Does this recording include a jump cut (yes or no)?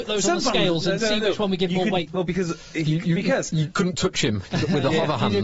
yes